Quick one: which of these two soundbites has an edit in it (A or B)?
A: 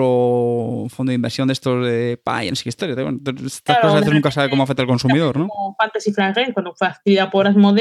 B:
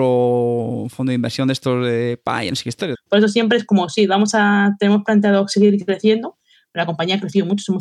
B